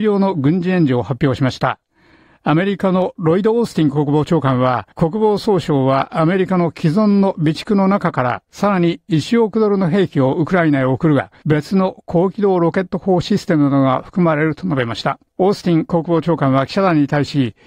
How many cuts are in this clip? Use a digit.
3